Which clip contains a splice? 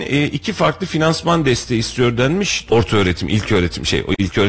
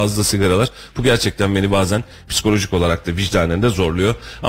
first; 1 cut; at 2.7 s

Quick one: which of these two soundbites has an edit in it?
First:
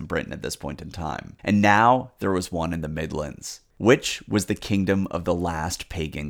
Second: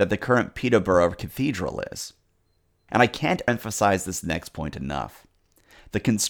first; 2 cuts; at 1.4 s, 3.7 s

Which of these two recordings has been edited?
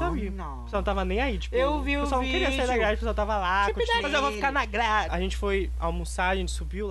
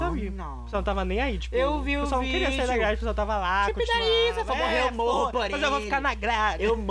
first; 2 cuts; at 4.0 s, 5.1 s

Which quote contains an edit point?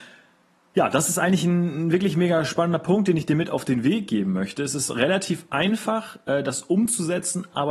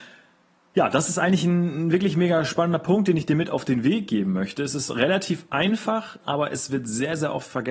second; 1 cut; at 6.2 s

